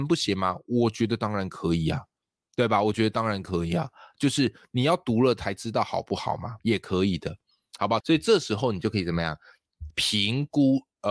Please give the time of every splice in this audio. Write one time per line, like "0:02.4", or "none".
0:06.6
0:08.0
0:09.9

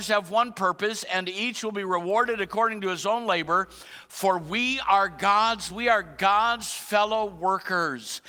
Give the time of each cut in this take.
0:05.7

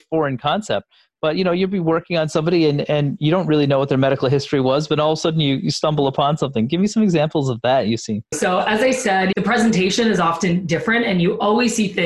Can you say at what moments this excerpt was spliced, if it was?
0:08.3
0:09.3

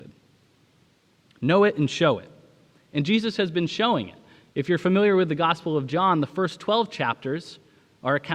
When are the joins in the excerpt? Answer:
none

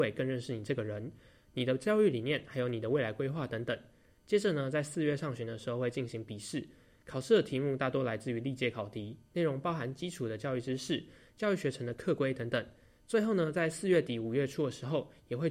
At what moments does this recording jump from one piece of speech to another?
none

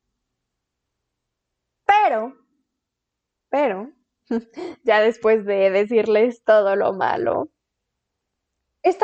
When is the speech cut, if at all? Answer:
none

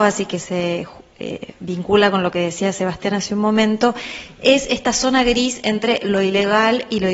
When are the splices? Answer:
none

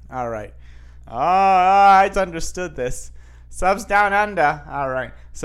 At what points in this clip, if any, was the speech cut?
0:01.0
0:02.1

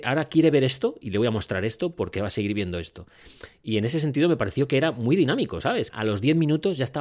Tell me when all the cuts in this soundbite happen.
0:05.9

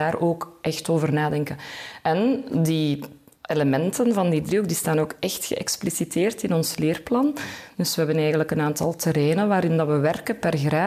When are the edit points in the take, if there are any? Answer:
none

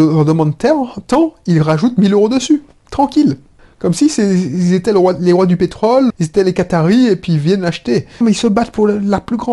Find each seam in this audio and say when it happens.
0:06.1
0:08.2

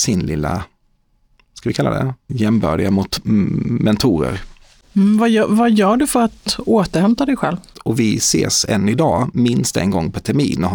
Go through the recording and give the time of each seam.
0:02.3
0:07.7

